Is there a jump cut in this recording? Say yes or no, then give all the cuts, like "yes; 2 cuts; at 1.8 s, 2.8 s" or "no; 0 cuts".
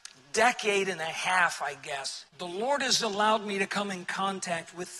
yes; 1 cut; at 2.3 s